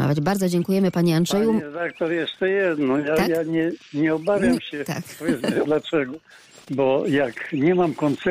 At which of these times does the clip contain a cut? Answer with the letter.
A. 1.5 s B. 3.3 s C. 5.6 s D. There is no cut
C